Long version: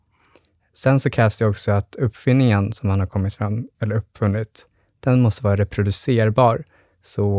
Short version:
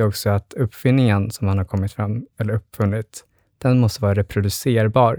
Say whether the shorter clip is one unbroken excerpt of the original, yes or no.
yes